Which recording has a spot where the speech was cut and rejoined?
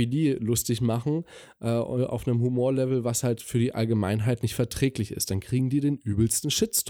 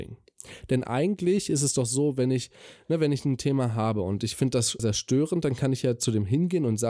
second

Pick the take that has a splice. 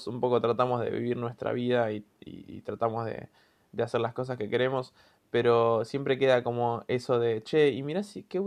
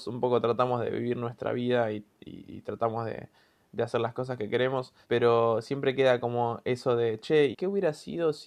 second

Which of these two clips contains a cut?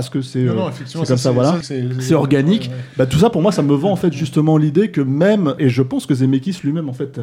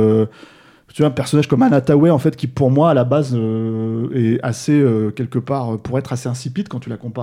first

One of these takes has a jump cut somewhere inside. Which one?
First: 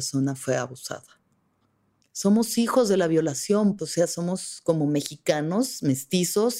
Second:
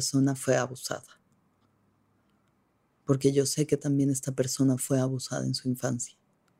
first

